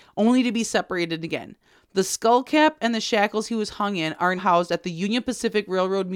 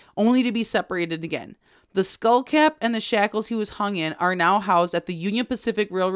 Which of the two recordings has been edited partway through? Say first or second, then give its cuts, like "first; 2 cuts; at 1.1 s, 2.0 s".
first; 1 cut; at 4.4 s